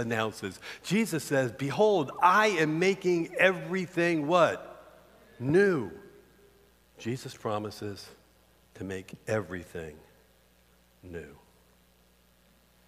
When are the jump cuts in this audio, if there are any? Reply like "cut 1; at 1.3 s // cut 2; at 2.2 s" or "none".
cut 1; at 6.8 s